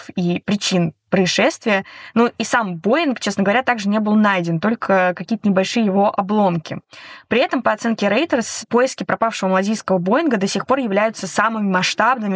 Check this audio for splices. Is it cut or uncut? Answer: uncut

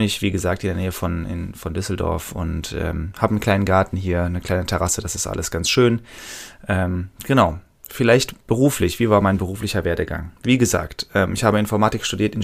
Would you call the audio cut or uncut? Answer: uncut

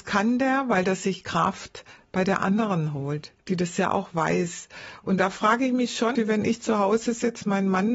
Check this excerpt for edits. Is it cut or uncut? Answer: cut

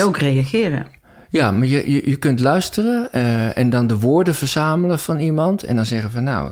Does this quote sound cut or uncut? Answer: uncut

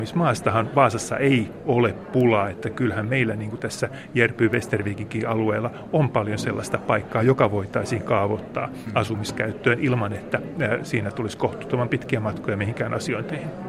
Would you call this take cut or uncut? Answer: uncut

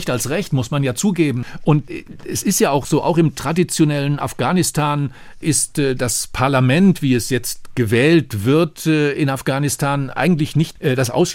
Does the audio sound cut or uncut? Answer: uncut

